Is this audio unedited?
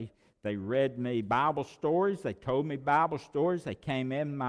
yes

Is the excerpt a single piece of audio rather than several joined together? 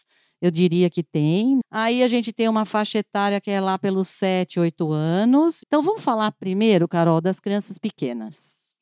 no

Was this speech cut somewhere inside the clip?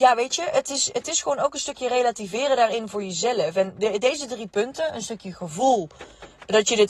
no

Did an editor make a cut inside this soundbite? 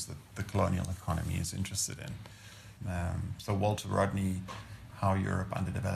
yes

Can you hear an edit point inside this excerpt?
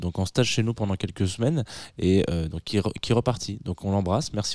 no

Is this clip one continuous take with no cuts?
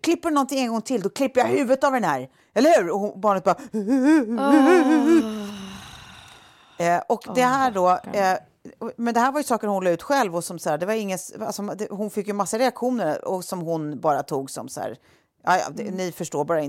yes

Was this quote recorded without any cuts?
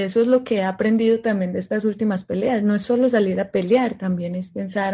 yes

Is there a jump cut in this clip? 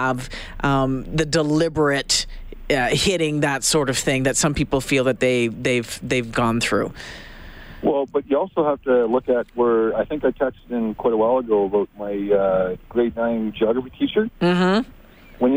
no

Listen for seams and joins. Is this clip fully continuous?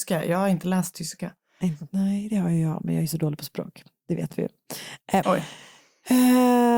no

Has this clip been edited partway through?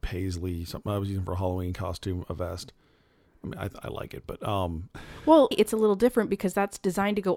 yes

